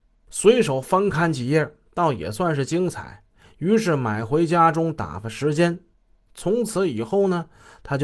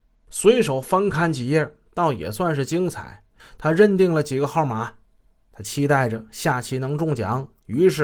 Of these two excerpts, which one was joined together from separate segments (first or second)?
second